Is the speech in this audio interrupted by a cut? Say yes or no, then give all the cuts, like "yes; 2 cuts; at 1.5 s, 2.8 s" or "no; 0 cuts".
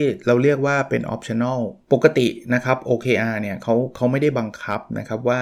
yes; 1 cut; at 1.8 s